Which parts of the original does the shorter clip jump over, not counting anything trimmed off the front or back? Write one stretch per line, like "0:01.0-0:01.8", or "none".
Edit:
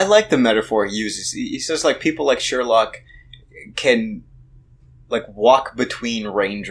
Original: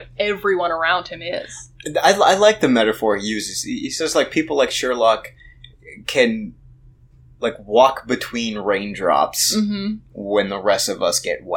none

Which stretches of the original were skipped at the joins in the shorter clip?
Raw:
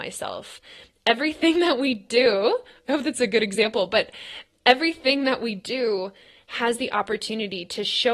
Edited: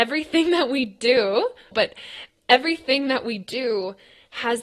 0:02.8-0:03.9

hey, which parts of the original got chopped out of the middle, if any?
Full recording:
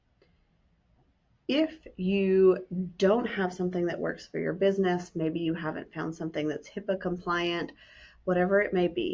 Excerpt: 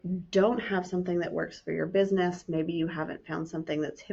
none

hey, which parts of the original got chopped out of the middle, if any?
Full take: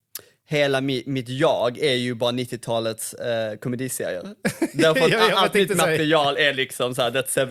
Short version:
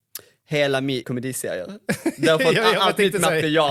0:01.0-0:03.6

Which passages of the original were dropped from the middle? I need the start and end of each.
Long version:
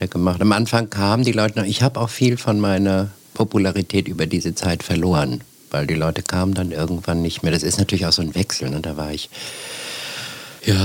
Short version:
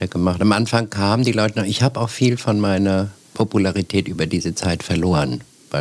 none

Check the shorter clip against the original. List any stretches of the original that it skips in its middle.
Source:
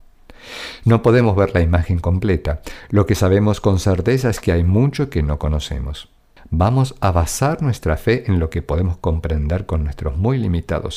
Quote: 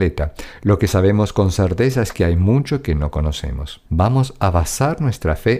0:06.1-0:06.5

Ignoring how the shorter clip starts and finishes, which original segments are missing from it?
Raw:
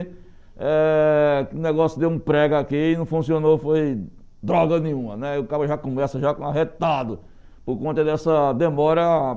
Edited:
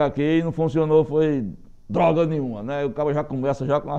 none

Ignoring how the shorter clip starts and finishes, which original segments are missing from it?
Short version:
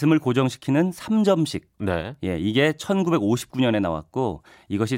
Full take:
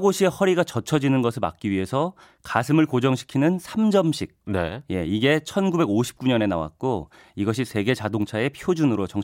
none

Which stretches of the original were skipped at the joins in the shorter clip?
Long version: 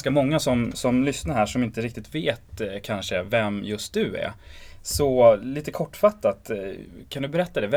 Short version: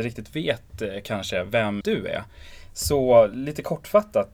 0:03.6-0:03.9

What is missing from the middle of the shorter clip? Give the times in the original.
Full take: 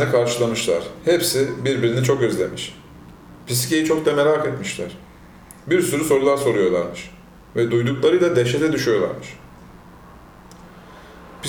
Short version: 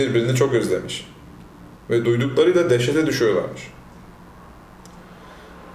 0:03.4-0:07.4

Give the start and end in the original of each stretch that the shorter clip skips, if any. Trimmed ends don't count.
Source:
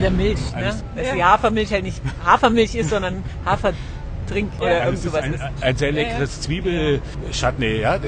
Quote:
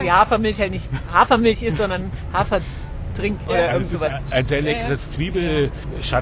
0:05.2-0:05.4

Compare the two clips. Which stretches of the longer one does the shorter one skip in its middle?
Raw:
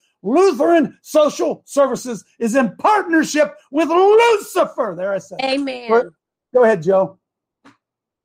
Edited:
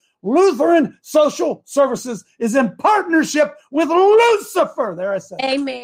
none

